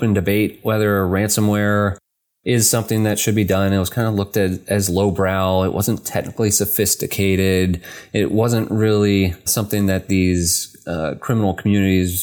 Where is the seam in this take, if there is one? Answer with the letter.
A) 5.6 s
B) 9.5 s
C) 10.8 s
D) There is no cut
B